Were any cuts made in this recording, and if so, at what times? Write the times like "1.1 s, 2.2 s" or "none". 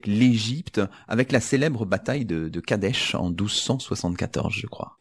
none